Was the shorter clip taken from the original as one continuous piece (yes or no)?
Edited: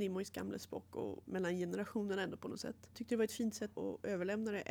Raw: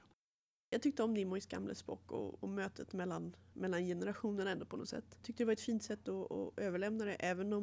no